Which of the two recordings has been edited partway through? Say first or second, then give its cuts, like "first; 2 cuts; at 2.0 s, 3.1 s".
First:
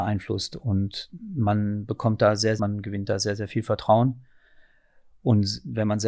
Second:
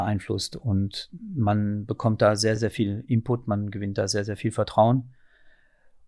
first; 1 cut; at 2.6 s